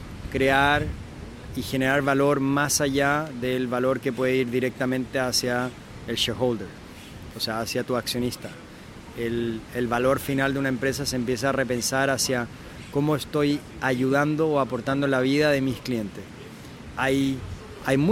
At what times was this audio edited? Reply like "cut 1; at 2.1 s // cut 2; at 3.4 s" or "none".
cut 1; at 16.9 s

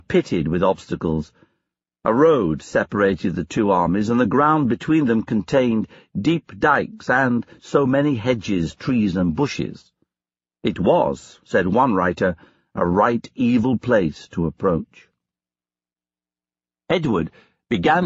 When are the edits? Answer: none

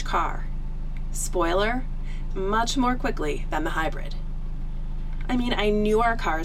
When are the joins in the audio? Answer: cut 1; at 2.3 s // cut 2; at 5.2 s

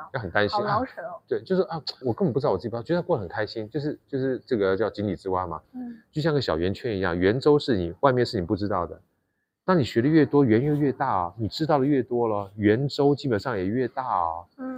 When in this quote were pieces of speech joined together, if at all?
cut 1; at 2.0 s // cut 2; at 5.6 s

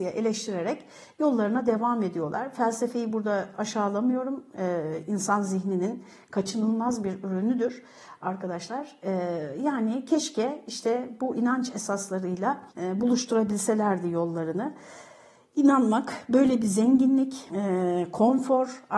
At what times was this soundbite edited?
cut 1; at 12.7 s // cut 2; at 17.5 s

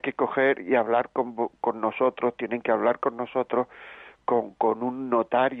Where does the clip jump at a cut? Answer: none

